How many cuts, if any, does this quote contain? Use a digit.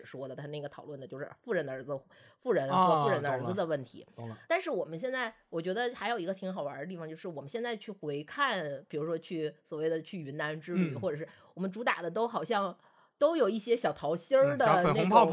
1